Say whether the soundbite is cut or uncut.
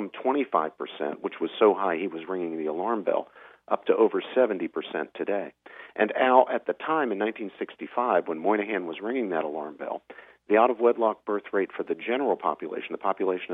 uncut